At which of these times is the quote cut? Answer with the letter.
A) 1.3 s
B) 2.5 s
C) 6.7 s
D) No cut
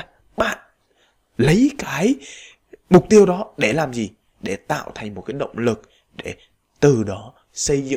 D